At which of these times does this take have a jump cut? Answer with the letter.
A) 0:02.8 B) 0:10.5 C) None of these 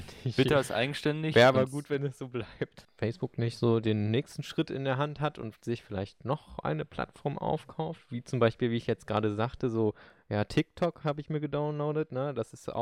A